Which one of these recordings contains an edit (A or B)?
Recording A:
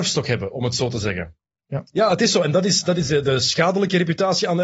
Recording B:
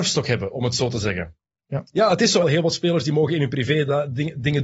B